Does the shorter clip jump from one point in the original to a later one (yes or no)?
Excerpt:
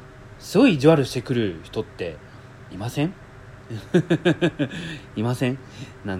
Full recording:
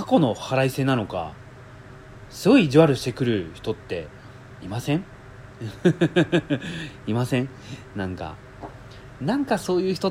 no